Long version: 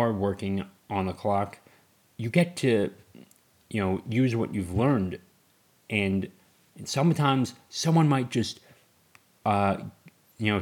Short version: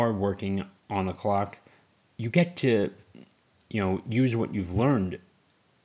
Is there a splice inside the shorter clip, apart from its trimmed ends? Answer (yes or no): no